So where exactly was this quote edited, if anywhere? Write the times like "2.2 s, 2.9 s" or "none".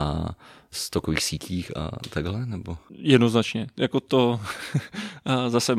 none